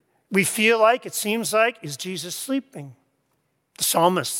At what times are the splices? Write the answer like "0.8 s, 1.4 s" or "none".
none

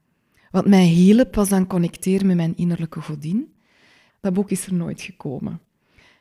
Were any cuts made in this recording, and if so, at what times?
4.1 s

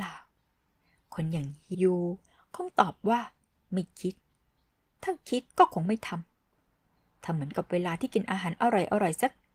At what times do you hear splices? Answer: 1.7 s, 5.5 s

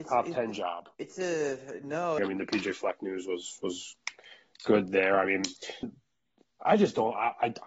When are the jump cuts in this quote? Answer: 0.9 s, 2.2 s, 5.8 s

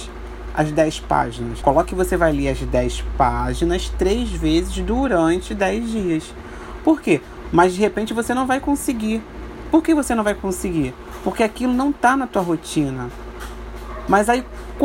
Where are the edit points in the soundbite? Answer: 1.6 s, 7.4 s

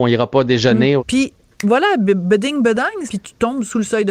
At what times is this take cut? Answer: 1.0 s, 3.1 s

